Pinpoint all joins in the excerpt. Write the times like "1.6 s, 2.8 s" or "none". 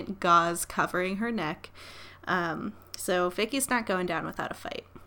none